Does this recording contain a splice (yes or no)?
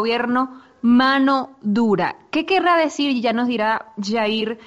no